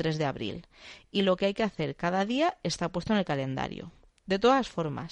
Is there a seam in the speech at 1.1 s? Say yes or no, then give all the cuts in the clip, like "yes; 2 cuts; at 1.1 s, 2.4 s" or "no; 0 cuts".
no; 0 cuts